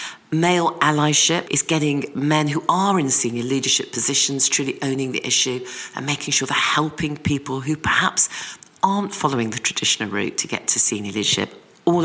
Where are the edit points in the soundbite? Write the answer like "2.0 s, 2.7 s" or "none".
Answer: 1.4 s